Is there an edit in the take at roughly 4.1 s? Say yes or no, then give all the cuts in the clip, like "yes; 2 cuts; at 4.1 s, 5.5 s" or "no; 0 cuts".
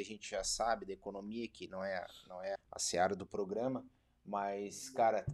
no; 1 cut; at 2.6 s